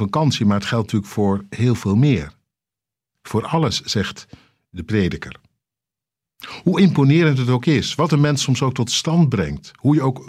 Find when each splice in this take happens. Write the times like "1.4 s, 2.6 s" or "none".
none